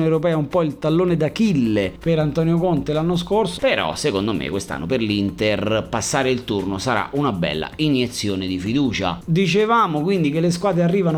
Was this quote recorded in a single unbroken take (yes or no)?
no